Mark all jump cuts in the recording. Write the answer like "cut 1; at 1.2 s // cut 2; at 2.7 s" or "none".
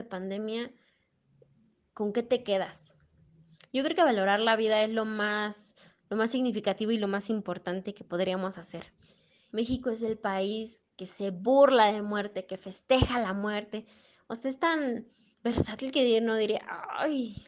cut 1; at 9.5 s